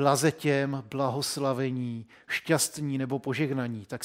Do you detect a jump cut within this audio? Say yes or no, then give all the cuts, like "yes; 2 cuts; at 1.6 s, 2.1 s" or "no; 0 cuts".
no; 0 cuts